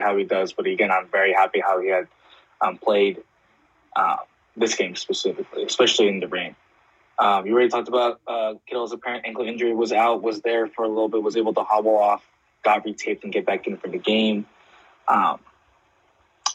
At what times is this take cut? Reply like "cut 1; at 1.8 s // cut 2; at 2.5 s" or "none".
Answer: none